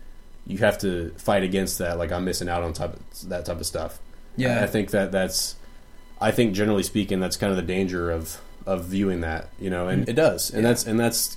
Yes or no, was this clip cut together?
yes